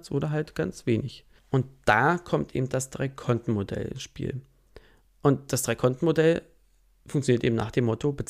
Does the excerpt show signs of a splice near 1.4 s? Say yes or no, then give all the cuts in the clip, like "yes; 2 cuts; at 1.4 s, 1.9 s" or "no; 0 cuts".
yes; 1 cut; at 1.4 s